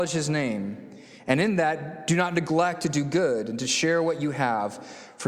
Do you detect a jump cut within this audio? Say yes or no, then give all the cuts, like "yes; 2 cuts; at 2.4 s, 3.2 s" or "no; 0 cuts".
no; 0 cuts